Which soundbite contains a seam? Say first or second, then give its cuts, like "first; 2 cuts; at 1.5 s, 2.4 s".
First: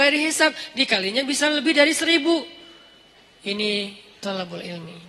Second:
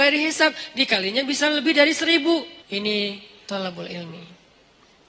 second; 1 cut; at 2.6 s